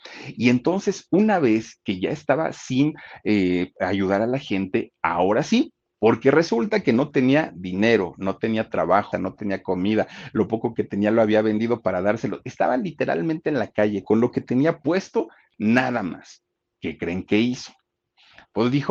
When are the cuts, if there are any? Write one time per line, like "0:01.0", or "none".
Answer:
0:05.9
0:09.1